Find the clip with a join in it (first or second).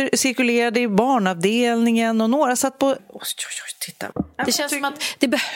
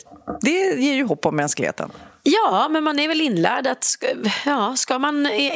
first